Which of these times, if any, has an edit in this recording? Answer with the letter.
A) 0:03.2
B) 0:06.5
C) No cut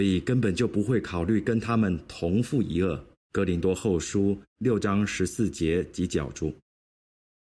A